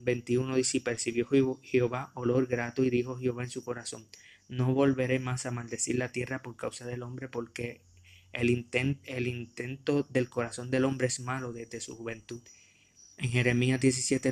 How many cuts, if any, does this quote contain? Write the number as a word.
one